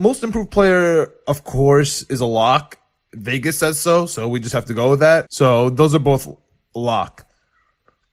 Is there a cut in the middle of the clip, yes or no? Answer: yes